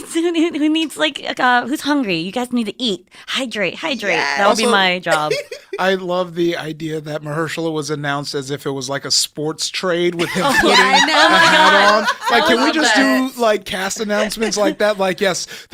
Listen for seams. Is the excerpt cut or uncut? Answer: uncut